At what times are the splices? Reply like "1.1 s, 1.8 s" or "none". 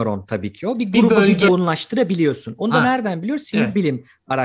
1.5 s